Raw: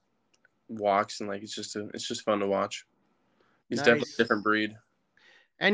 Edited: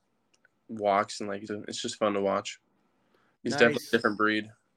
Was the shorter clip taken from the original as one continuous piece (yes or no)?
no